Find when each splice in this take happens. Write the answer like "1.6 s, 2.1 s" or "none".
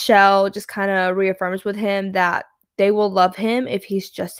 none